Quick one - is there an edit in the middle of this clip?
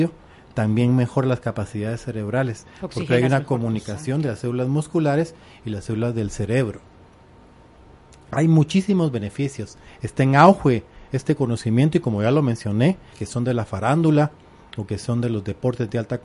yes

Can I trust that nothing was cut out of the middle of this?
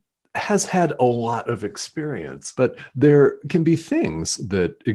no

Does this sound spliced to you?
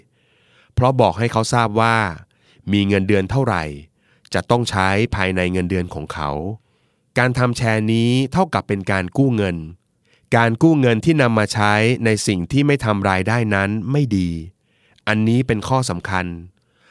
no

